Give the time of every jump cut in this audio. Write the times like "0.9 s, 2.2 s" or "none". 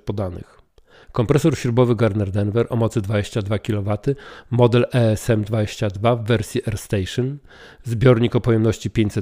1.0 s